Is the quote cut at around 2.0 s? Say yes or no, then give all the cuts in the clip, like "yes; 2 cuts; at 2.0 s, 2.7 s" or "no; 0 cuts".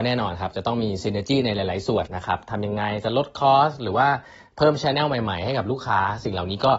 yes; 1 cut; at 2.0 s